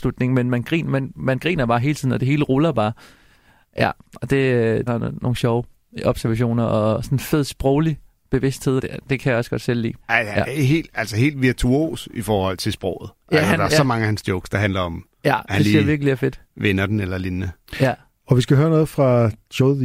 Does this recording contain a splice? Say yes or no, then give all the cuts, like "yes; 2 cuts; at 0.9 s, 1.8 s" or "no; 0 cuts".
yes; 3 cuts; at 4.9 s, 8.8 s, 10.0 s